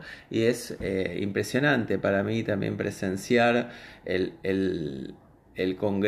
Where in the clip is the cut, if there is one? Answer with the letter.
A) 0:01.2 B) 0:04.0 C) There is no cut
B